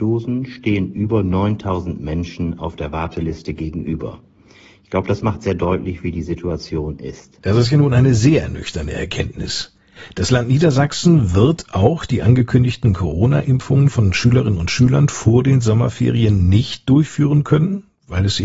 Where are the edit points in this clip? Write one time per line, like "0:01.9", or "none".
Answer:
none